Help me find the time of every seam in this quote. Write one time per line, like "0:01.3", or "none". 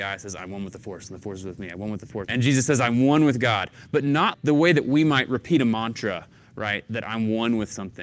0:02.3
0:04.3